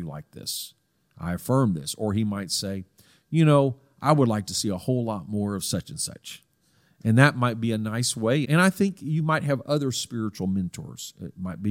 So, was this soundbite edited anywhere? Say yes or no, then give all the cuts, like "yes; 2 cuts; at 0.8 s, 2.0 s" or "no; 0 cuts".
yes; 1 cut; at 8.4 s